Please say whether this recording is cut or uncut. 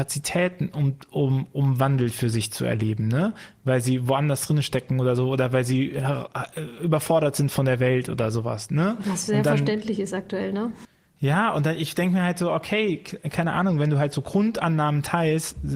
uncut